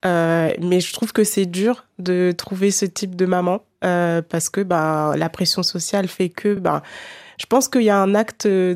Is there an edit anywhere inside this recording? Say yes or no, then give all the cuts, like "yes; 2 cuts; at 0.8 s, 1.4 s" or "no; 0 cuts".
no; 0 cuts